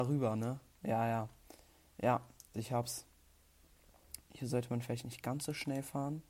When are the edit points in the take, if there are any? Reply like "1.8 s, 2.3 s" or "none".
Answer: 2.5 s, 4.2 s